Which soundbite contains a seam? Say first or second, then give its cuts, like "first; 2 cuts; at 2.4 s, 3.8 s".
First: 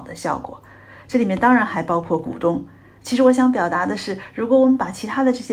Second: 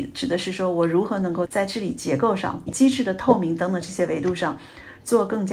second; 2 cuts; at 1.4 s, 2.7 s